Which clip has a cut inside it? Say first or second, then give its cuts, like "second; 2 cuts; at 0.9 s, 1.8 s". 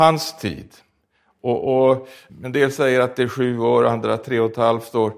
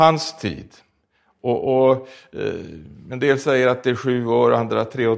first; 1 cut; at 2.3 s